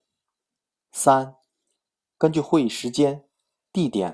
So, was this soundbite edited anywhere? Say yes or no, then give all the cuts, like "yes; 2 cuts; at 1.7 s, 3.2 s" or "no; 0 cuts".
no; 0 cuts